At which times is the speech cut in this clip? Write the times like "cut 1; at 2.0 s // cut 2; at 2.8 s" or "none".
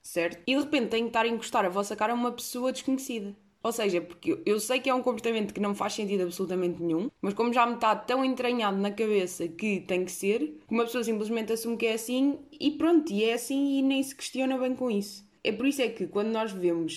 cut 1; at 3.6 s